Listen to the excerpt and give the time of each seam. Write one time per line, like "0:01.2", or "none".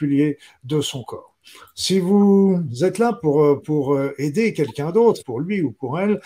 0:05.2